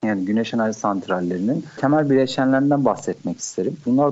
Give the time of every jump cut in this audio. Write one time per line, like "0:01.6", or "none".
none